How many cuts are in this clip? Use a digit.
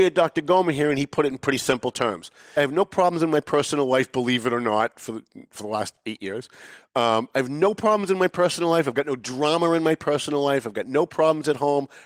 1